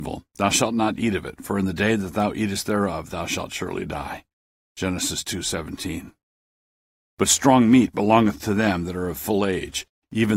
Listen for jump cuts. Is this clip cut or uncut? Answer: uncut